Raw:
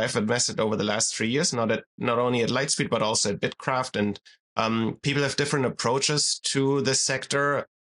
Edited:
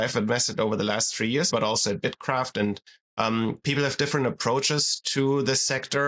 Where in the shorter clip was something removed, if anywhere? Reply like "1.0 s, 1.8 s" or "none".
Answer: 1.5 s